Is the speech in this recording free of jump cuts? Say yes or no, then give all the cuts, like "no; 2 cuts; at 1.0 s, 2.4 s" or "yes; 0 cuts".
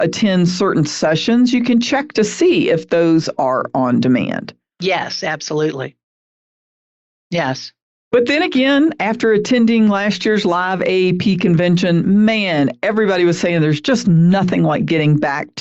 yes; 0 cuts